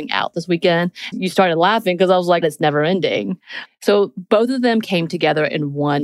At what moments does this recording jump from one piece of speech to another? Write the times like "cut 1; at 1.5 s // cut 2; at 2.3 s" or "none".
cut 1; at 1.1 s // cut 2; at 2.4 s // cut 3; at 3.7 s